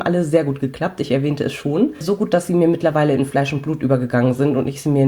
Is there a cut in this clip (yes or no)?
no